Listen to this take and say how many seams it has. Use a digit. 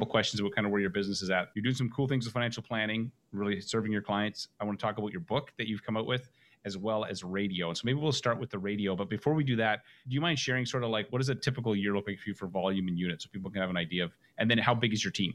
0